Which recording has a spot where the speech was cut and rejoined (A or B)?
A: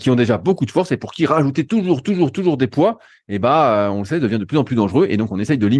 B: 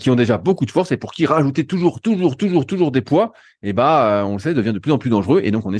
A